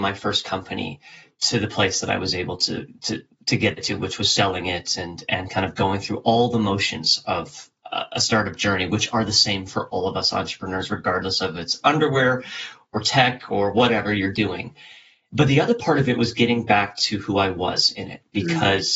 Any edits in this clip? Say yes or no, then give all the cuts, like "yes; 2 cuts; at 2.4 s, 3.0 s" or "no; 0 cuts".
no; 0 cuts